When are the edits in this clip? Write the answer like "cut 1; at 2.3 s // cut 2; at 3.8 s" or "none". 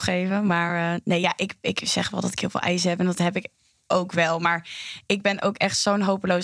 none